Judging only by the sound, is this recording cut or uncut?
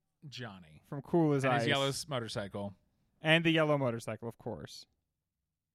uncut